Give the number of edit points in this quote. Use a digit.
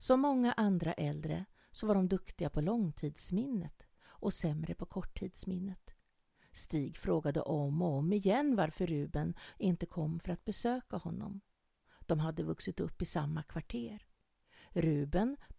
1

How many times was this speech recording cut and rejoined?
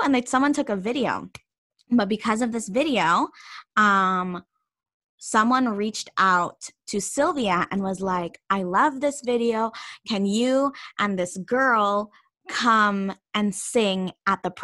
0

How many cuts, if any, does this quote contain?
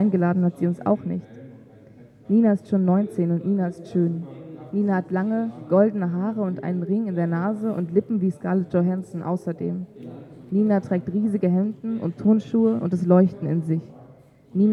0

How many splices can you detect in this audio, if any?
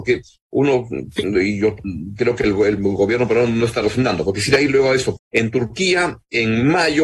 1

